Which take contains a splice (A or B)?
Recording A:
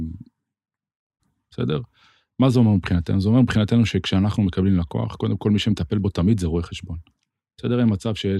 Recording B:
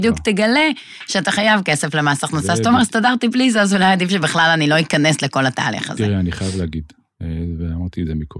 A